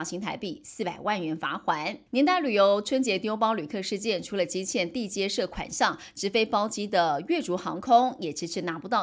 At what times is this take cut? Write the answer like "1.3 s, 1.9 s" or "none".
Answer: 2.1 s

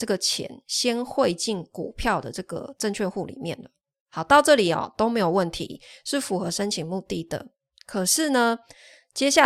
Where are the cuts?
none

